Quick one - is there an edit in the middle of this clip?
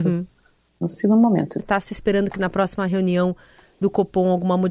yes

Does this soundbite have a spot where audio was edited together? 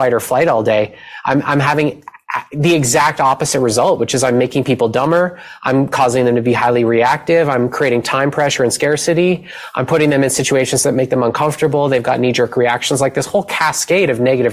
no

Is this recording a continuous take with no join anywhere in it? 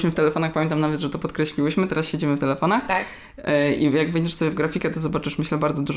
yes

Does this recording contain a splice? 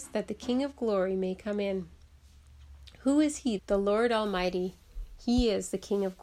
yes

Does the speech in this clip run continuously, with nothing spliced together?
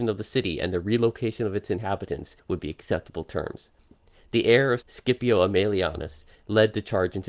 no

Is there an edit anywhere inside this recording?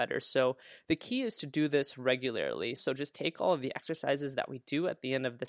yes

